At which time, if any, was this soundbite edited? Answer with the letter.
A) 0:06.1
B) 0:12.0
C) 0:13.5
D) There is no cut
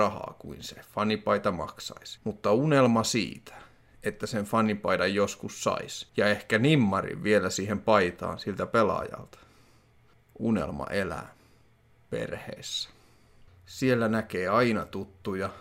C